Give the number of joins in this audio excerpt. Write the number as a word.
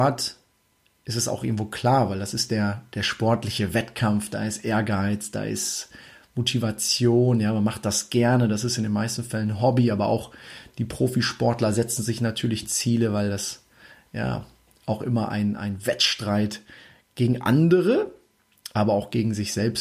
zero